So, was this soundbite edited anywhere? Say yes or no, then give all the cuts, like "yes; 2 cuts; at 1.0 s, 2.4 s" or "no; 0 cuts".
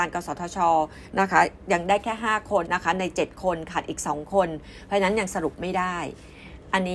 yes; 1 cut; at 2.7 s